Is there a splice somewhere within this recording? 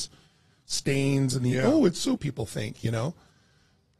yes; 1 cut; at 2.2 s

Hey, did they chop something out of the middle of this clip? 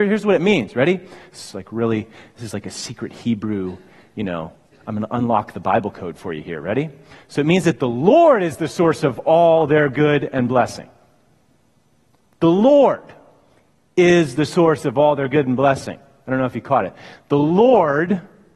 no; 0 cuts

